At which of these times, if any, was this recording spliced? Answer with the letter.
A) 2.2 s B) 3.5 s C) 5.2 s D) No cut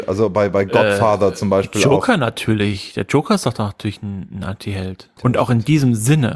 C